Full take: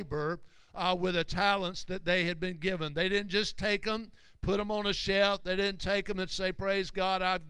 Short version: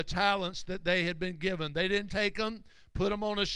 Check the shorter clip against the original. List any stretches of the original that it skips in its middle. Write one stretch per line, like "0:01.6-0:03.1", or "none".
0:03.3-0:03.6